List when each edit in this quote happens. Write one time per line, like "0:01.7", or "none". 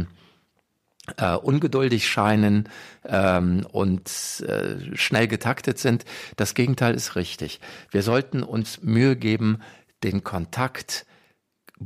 none